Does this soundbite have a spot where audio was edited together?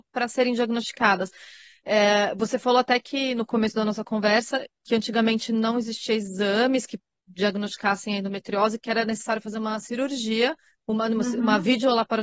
no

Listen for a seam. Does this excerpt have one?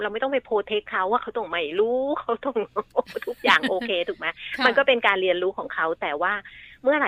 no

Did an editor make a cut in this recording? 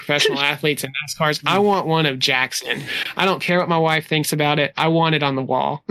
no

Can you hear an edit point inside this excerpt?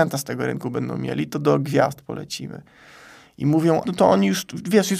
yes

